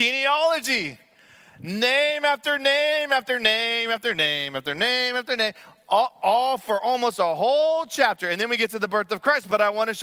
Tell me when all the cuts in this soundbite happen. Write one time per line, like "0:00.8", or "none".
none

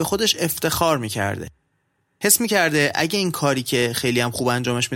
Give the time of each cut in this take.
none

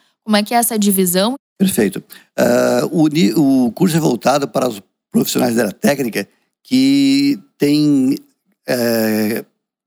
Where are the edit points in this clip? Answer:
none

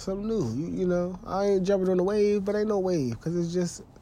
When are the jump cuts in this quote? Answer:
none

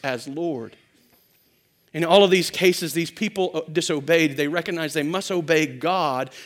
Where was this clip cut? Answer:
none

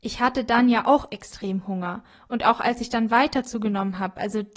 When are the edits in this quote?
none

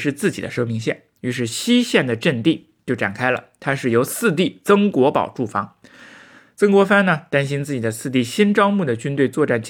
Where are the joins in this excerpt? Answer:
none

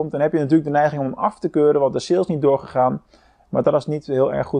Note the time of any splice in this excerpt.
none

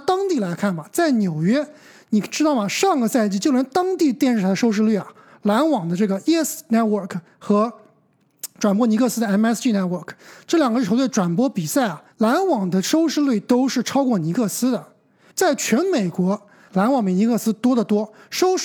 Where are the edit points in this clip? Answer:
0:12.1
0:15.3
0:16.7

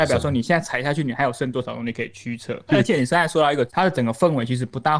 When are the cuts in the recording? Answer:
0:02.7
0:03.7

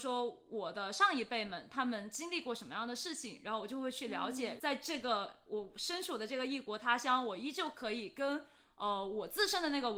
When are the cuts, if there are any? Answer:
0:04.6

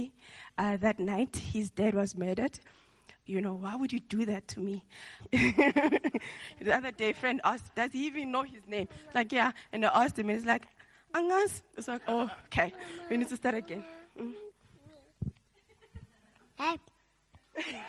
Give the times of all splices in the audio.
0:03.3
0:05.2

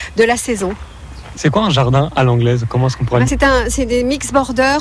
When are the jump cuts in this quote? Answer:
0:01.4
0:03.3

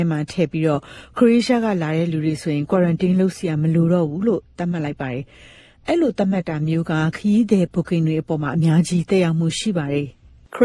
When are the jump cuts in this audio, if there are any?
none

